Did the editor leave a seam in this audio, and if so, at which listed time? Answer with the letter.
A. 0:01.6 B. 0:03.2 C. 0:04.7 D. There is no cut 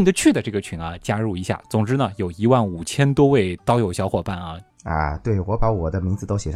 C